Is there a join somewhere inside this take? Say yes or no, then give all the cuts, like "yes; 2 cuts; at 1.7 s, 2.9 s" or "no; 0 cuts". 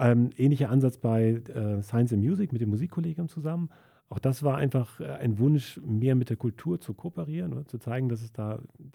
no; 0 cuts